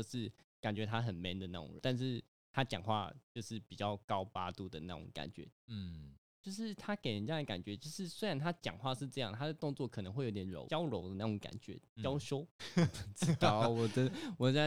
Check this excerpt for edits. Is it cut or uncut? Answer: cut